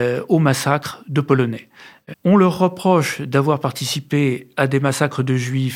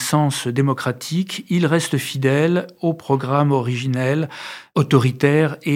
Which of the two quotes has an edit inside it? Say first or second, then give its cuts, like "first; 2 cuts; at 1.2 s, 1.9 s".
first; 1 cut; at 2.1 s